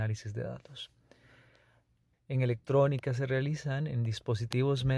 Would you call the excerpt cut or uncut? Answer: cut